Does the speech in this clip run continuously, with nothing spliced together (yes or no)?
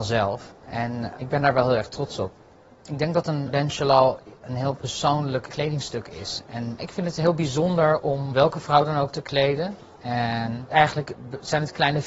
yes